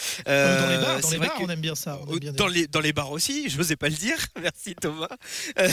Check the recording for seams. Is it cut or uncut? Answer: uncut